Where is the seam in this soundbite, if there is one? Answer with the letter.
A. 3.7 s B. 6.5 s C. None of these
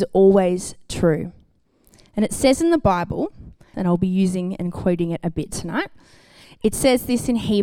A